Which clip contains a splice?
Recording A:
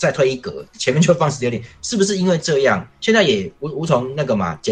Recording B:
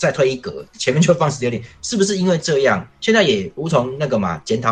B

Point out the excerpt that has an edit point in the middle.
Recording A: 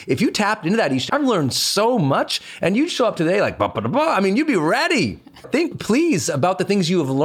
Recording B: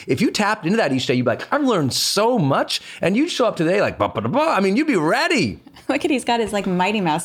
A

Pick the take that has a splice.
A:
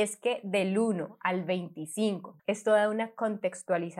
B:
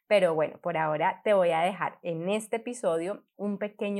A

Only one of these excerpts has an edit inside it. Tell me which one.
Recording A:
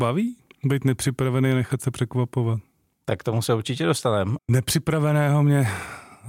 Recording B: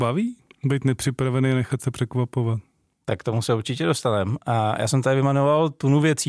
A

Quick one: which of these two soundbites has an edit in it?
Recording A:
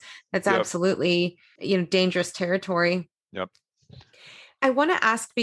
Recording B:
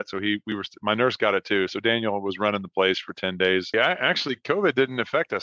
B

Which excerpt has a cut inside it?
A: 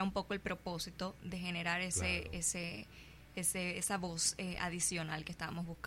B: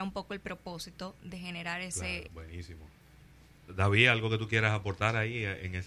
B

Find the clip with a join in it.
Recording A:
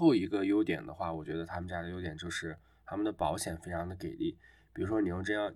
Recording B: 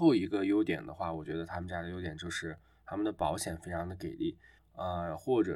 B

